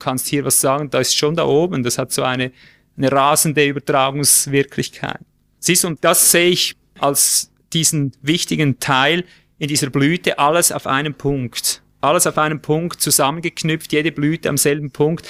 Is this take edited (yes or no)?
no